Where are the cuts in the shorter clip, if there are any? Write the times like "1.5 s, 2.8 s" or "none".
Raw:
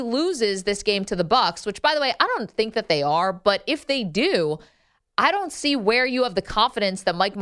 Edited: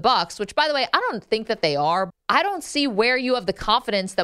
2.1 s